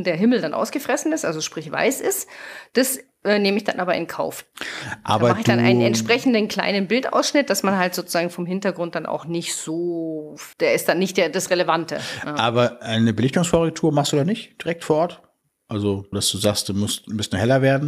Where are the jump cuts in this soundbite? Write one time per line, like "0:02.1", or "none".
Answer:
0:10.5
0:16.1